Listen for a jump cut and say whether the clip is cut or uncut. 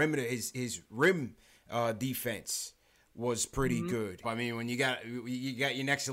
cut